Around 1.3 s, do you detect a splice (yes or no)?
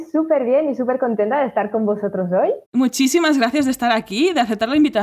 no